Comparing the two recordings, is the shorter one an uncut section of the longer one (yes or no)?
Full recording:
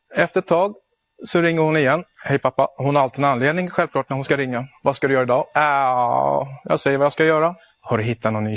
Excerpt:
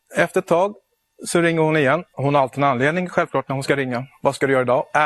no